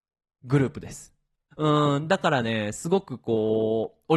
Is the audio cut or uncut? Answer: cut